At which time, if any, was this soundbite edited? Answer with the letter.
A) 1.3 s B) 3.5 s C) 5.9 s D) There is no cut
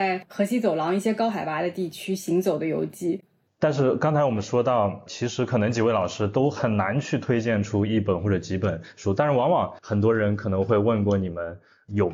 B